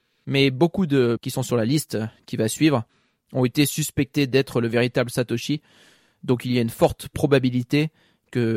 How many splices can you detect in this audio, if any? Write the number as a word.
one